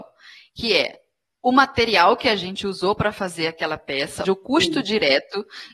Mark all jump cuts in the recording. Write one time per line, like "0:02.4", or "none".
0:04.2